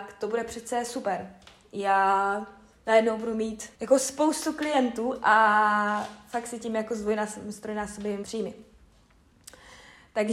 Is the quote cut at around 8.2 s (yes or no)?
yes